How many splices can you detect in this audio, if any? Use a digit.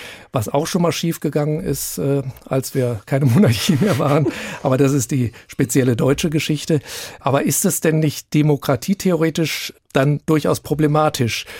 0